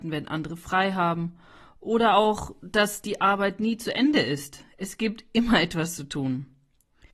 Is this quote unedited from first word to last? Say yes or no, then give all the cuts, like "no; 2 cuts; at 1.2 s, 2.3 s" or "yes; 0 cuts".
yes; 0 cuts